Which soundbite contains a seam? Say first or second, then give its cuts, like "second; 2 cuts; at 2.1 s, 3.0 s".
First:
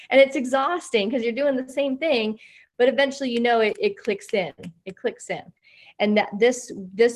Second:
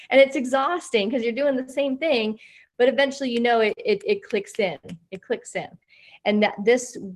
first; 1 cut; at 3.7 s